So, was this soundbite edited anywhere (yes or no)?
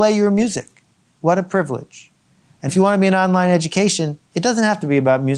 yes